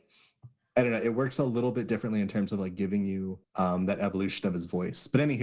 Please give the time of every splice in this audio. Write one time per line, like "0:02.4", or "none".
0:03.4